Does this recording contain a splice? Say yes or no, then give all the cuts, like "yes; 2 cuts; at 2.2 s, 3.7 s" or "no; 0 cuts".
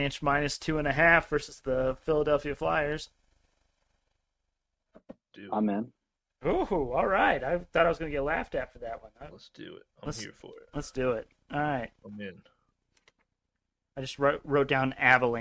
yes; 1 cut; at 9.3 s